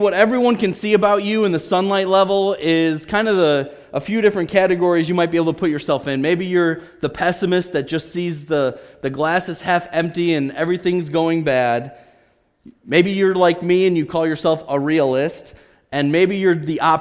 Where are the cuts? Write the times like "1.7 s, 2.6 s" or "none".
none